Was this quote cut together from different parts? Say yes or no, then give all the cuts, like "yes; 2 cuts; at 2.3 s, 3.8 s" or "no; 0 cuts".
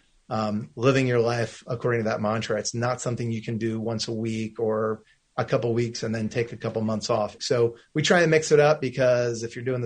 yes; 1 cut; at 7.4 s